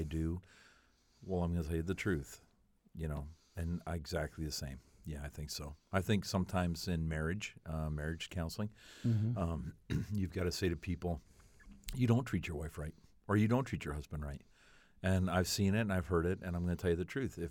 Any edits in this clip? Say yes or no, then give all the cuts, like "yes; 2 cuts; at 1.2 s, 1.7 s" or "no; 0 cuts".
no; 0 cuts